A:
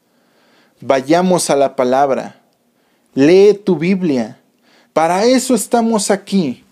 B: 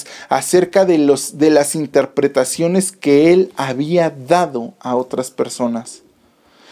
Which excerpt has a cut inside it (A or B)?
A